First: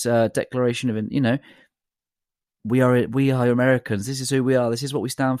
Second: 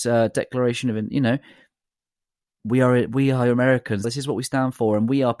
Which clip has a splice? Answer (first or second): second